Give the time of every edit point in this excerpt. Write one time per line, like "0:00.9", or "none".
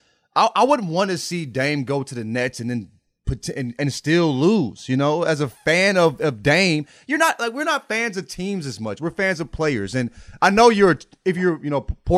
none